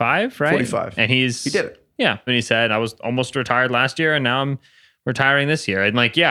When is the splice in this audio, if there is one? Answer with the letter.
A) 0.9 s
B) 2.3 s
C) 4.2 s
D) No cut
B